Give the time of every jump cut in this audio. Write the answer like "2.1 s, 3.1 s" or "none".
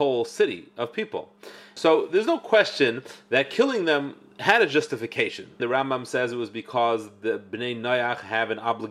1.8 s, 5.6 s